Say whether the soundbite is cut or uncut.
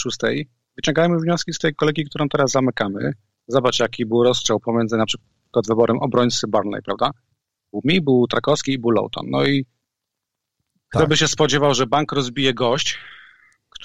uncut